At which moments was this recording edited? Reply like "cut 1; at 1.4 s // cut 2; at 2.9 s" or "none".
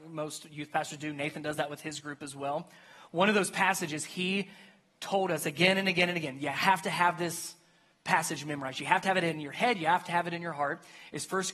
none

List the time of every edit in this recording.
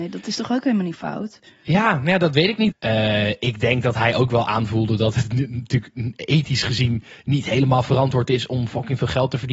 cut 1; at 2.7 s

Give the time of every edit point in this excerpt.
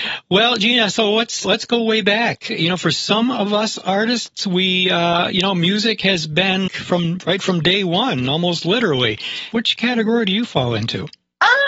cut 1; at 1.4 s // cut 2; at 6.7 s // cut 3; at 9.5 s

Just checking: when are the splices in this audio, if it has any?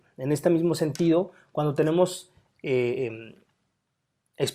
none

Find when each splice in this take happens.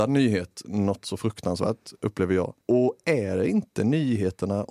cut 1; at 2.6 s

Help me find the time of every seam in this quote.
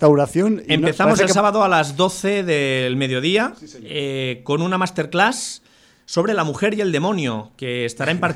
none

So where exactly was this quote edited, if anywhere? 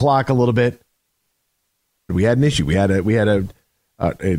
cut 1; at 2.1 s

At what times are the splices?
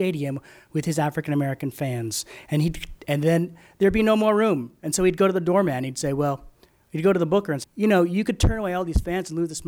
cut 1; at 7.6 s

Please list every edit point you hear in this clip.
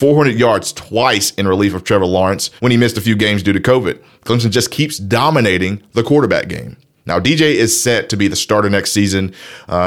cut 1; at 2.6 s

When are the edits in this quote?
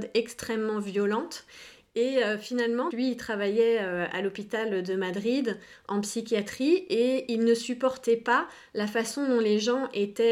cut 1; at 1.9 s // cut 2; at 2.9 s

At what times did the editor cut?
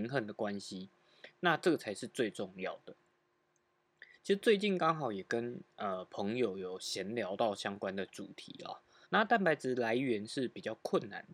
cut 1; at 9.0 s

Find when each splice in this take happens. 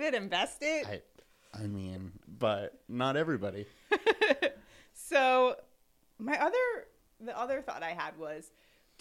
cut 1; at 2.2 s

